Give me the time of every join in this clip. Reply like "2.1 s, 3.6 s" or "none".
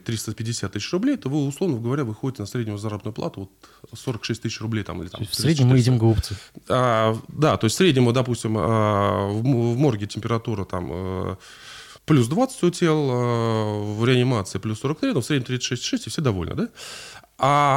12.0 s